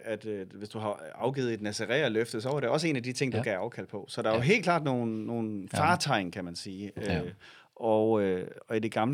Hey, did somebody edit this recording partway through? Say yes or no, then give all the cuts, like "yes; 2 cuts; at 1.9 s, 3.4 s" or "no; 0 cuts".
no; 0 cuts